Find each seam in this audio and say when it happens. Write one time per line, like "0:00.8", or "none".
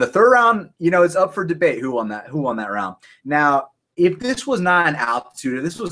none